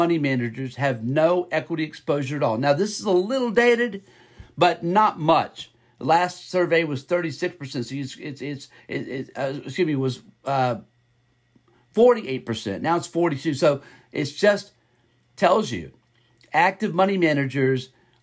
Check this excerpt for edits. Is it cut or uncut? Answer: uncut